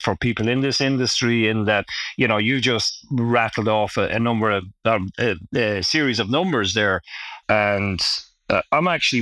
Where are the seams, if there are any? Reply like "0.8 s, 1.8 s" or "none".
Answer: 7.4 s